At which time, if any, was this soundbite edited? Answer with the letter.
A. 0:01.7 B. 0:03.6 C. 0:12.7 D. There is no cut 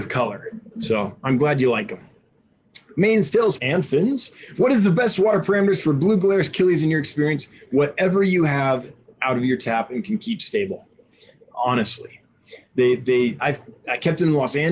B